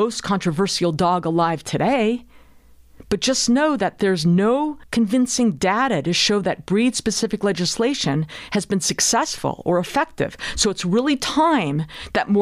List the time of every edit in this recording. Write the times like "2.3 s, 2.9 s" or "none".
none